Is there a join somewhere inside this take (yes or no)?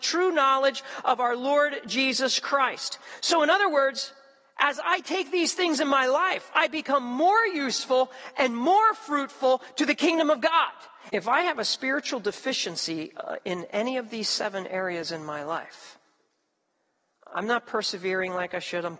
yes